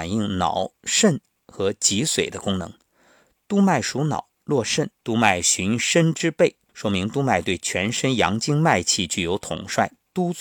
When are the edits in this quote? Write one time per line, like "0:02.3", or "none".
0:05.0
0:06.7